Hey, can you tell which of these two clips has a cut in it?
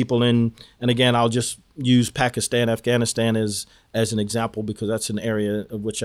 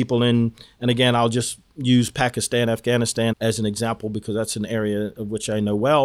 second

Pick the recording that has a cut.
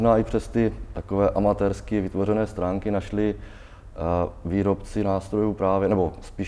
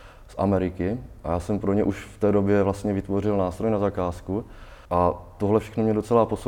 second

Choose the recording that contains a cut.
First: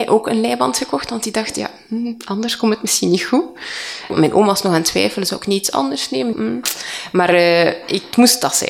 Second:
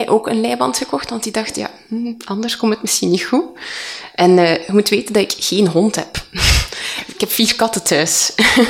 first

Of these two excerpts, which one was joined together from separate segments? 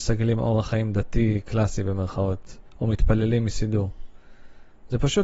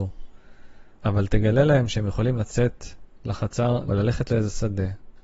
second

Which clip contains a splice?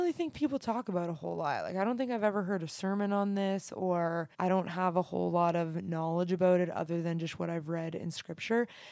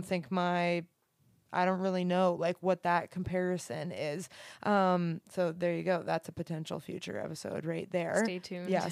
first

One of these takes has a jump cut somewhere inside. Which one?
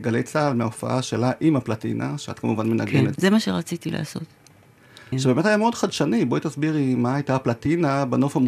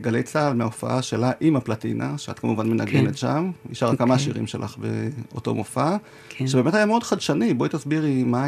first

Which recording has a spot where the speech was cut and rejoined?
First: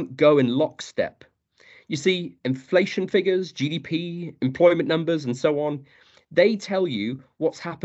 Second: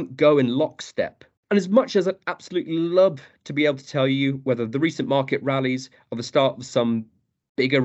second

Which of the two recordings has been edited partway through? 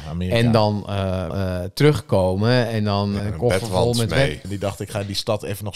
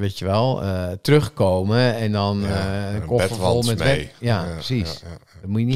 first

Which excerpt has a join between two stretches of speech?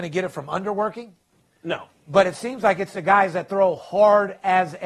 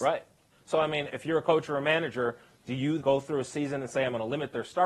second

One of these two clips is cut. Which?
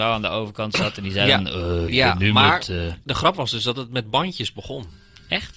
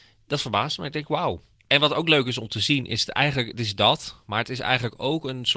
first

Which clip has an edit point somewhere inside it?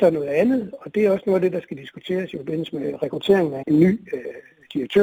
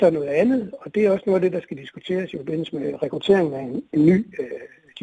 first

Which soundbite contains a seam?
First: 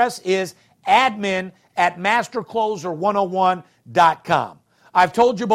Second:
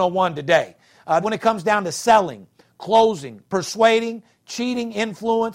second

